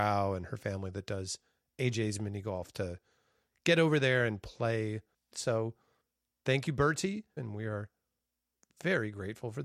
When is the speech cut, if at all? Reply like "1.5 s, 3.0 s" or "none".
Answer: 5.3 s, 7.4 s